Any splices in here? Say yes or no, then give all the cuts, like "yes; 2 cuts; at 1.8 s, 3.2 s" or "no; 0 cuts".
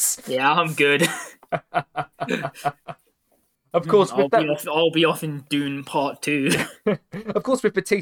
no; 0 cuts